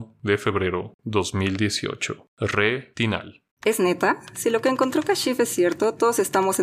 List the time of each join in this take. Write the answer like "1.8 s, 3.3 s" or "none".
3.5 s